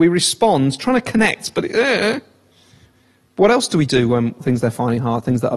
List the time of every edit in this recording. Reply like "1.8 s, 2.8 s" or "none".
4.4 s